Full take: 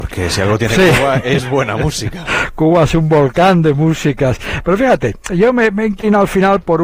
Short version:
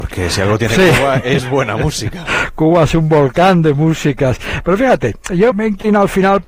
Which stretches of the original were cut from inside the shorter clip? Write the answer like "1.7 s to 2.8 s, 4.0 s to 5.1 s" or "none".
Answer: 5.5 s to 5.7 s